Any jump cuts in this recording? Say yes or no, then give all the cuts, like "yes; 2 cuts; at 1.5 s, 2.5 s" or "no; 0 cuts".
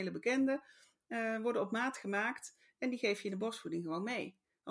no; 0 cuts